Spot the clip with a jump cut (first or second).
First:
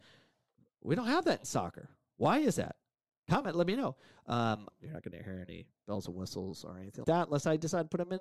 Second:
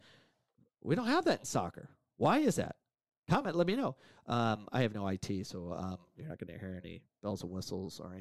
first